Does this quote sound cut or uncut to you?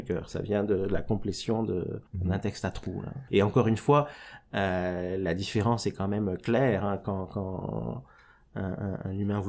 cut